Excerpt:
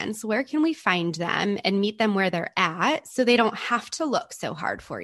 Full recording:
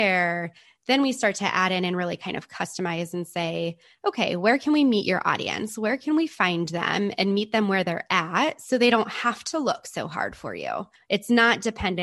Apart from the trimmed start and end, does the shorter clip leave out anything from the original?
no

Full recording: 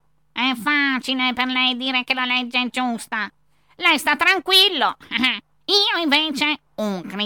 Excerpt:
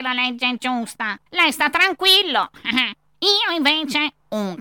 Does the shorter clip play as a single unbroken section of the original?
no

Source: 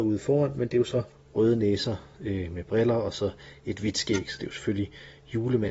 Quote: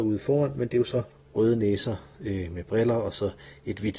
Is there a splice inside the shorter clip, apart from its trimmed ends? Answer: no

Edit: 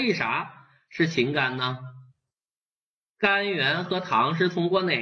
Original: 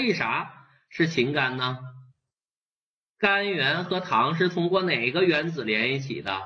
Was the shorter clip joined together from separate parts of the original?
no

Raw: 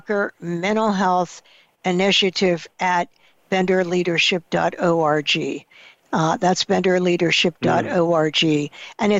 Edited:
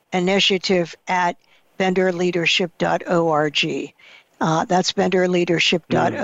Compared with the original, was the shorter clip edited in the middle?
no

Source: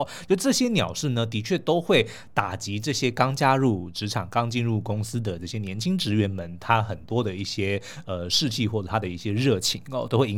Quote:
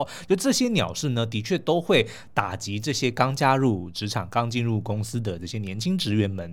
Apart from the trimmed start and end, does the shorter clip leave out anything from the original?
no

